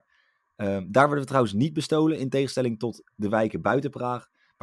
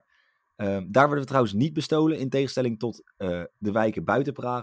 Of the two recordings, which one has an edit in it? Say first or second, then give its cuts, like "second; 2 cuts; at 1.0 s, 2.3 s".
first; 1 cut; at 3.1 s